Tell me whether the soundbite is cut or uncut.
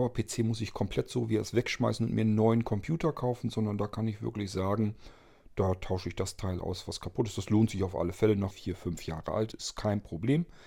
cut